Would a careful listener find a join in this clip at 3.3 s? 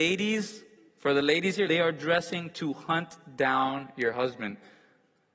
no; 1 cut; at 1.7 s

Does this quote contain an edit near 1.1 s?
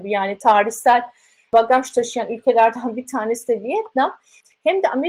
no; 0 cuts

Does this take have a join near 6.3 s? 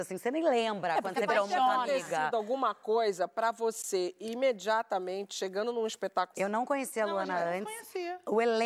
yes; 1 cut; at 6.3 s

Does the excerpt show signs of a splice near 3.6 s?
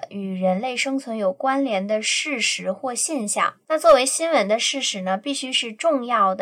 yes; 1 cut; at 3.6 s

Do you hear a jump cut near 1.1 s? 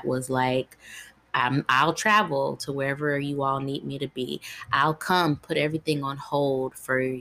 no; 0 cuts

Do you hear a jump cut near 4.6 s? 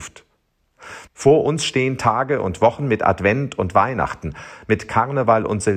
no; 1 cut; at 1.1 s

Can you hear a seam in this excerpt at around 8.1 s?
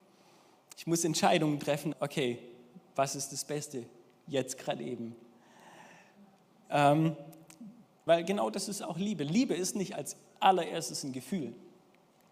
yes; 2 cuts; at 1.9 s, 8.1 s

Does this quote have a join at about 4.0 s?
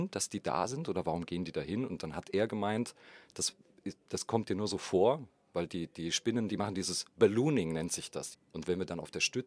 no; 2 cuts; at 6.5 s, 8.3 s

